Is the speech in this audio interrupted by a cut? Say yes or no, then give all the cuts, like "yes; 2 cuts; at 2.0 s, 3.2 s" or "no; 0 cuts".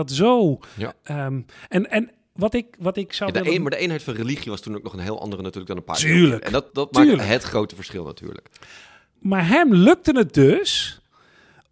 yes; 2 cuts; at 6.7 s, 9.2 s